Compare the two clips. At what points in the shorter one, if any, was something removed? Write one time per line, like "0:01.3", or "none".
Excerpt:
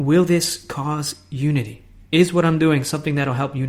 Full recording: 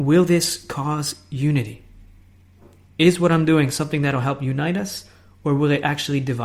0:02.1